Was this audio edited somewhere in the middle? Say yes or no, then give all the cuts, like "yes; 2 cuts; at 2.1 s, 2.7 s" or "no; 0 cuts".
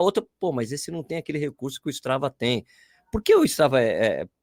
no; 0 cuts